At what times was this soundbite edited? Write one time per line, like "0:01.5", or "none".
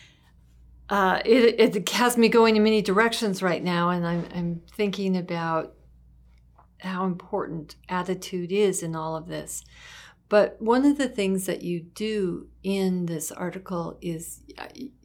none